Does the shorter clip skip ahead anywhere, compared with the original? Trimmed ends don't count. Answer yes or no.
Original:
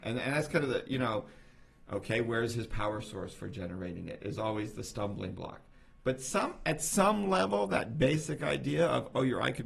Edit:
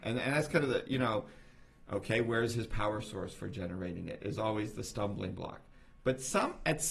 no